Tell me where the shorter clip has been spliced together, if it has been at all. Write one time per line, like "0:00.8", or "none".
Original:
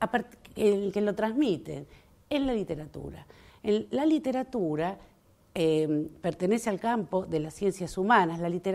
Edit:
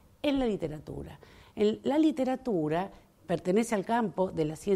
0:03.2